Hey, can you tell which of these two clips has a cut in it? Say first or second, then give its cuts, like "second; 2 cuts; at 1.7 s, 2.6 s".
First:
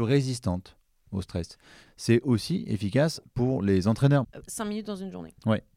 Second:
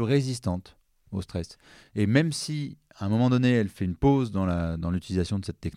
first; 2 cuts; at 1.9 s, 4.2 s